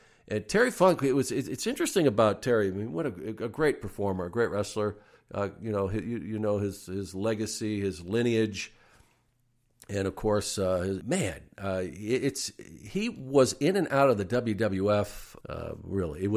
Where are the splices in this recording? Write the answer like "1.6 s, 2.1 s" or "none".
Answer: 11.0 s, 15.4 s